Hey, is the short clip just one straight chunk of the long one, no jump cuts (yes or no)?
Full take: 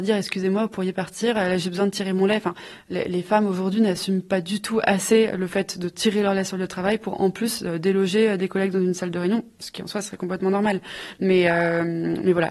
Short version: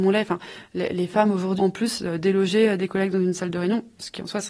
no